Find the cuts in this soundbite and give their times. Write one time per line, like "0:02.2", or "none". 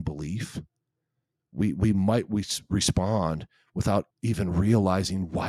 0:01.4
0:04.1